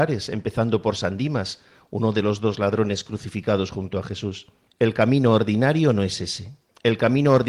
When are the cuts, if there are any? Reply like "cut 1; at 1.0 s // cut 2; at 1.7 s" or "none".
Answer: cut 1; at 4.7 s

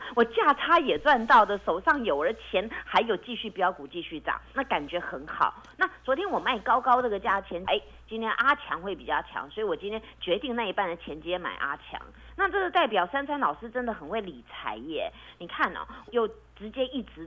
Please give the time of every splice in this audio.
cut 1; at 4.5 s // cut 2; at 7.6 s // cut 3; at 16.1 s

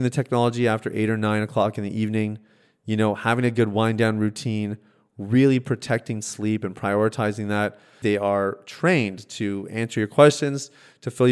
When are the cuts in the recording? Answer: cut 1; at 8.0 s

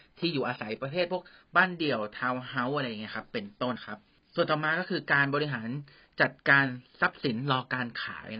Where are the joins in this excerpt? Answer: cut 1; at 3.8 s

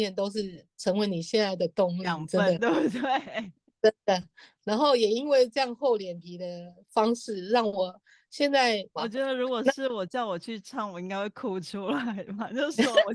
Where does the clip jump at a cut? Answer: cut 1; at 9.0 s

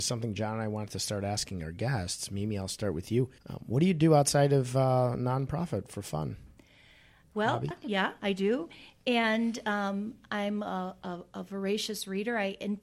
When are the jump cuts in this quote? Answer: cut 1; at 3.4 s // cut 2; at 7.7 s

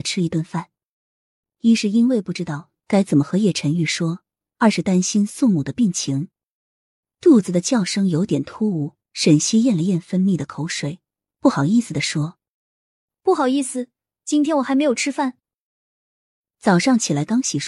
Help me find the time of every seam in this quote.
none

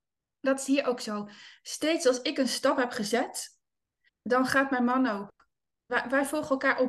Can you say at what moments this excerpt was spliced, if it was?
cut 1; at 4.1 s

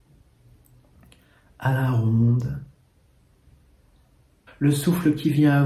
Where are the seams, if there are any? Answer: cut 1; at 4.5 s

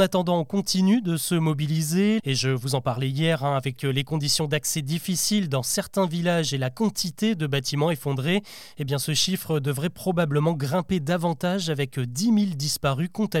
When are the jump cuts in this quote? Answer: cut 1; at 2.2 s

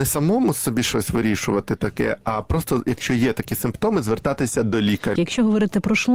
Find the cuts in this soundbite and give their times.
cut 1; at 5.2 s

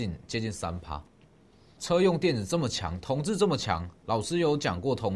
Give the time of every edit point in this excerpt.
cut 1; at 1.8 s

